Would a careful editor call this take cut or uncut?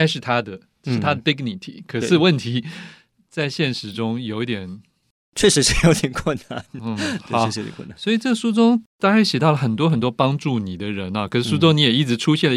uncut